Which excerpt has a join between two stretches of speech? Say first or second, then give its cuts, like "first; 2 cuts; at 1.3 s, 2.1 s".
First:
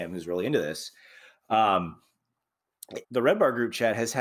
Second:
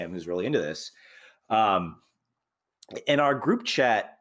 first; 1 cut; at 3.0 s